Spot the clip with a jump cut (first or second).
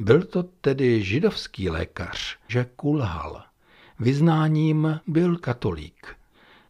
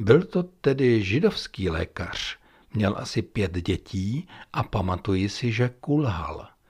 first